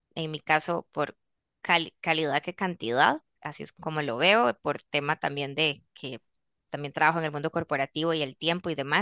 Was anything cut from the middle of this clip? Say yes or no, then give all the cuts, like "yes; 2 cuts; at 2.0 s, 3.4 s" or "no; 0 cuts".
yes; 2 cuts; at 3.7 s, 6.7 s